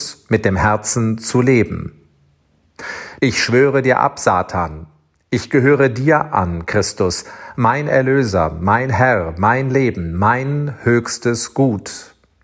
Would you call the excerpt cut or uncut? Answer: cut